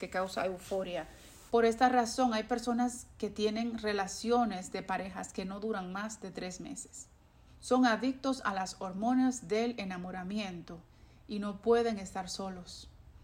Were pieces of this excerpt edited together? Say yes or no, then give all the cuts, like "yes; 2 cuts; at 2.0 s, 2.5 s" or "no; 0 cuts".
yes; 2 cuts; at 1.5 s, 7.5 s